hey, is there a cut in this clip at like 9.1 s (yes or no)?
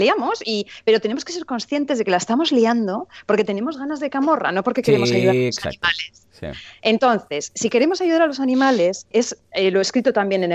yes